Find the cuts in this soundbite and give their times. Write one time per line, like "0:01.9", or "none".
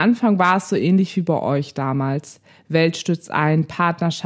none